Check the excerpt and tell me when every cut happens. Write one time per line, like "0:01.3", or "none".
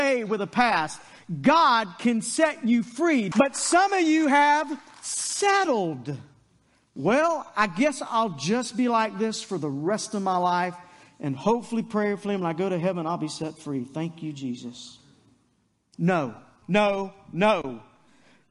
0:03.3
0:16.6